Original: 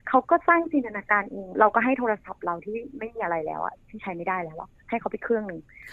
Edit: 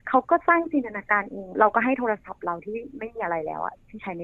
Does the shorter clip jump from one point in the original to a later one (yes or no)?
no